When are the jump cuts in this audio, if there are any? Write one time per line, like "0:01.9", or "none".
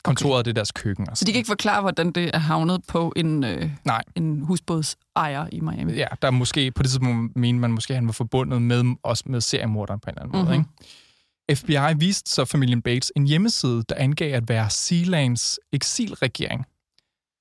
0:09.2